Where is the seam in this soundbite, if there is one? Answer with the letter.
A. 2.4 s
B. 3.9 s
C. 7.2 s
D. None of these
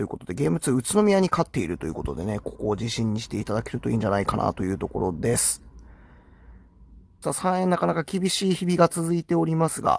C